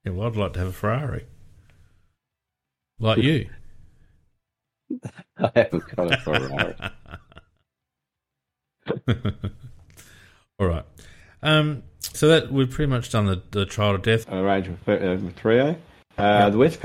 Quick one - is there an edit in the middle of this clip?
yes; 2 cuts; at 12.1 s, 14.2 s

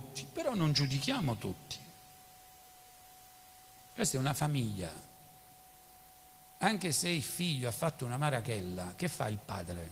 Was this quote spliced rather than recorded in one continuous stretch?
no; 0 cuts

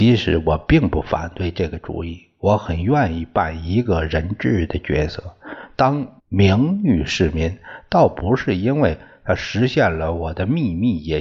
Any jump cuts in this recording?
yes; 1 cut; at 6.2 s

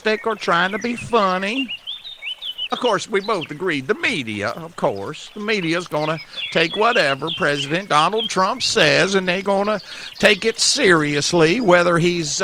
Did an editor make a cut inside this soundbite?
yes; 1 cut; at 2.7 s

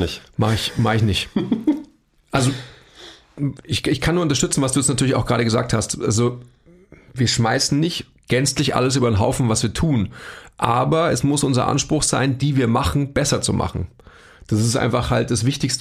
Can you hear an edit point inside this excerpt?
yes; 1 cut; at 12.4 s

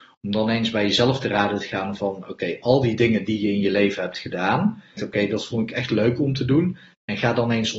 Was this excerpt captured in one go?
no; 1 cut; at 5.0 s

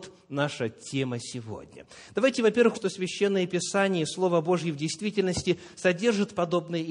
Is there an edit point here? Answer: yes; 1 cut; at 2.7 s

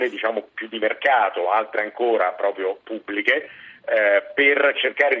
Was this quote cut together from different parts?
yes; 1 cut; at 1.4 s

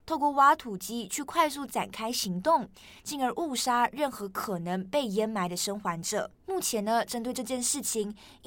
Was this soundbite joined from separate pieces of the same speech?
yes; 2 cuts; at 3.0 s, 6.3 s

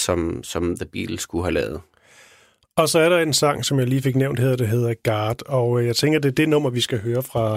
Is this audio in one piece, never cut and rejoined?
yes; 0 cuts

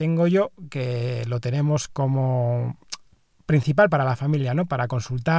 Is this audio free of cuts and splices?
yes; 0 cuts

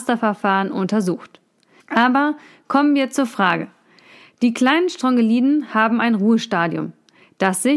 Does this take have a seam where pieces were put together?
yes; 1 cut; at 1.8 s

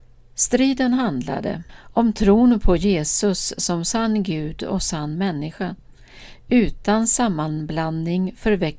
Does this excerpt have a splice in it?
yes; 1 cut; at 1.7 s

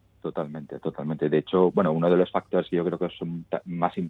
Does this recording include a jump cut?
no; 0 cuts

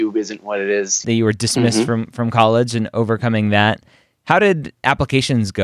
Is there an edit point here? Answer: yes; 1 cut; at 1.0 s

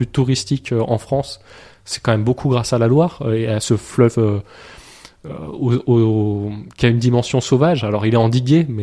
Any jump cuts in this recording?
no; 0 cuts

